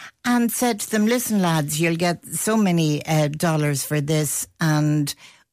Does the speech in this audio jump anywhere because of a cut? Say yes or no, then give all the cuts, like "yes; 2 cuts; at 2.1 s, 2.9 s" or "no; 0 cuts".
no; 0 cuts